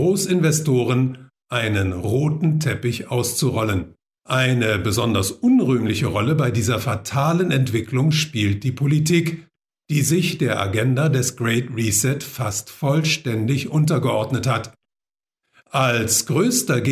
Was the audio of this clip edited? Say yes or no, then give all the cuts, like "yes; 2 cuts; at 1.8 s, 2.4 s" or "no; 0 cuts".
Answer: yes; 1 cut; at 4.2 s